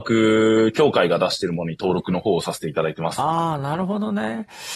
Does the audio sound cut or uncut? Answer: uncut